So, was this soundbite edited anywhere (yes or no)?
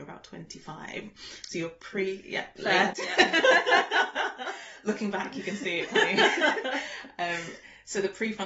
no